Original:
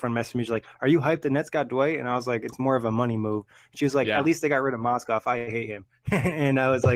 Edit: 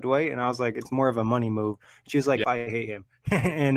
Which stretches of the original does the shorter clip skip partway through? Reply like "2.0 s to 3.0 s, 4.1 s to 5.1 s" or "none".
4.1 s to 5.2 s